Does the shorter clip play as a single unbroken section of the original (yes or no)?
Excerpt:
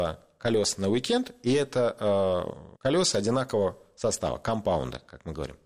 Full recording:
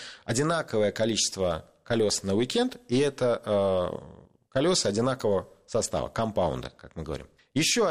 no